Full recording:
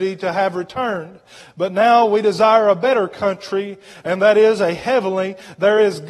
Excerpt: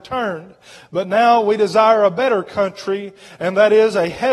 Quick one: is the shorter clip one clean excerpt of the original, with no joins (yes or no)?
yes